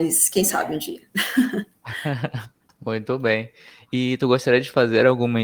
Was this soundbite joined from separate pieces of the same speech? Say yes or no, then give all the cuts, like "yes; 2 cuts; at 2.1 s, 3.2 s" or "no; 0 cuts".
no; 0 cuts